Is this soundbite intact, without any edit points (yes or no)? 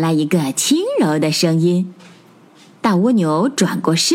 yes